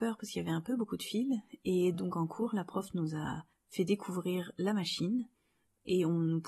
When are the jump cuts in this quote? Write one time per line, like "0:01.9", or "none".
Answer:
none